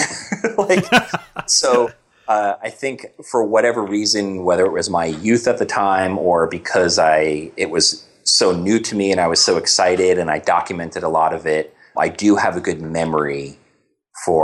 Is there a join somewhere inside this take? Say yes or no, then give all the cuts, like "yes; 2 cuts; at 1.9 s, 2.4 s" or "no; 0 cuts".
yes; 1 cut; at 11.9 s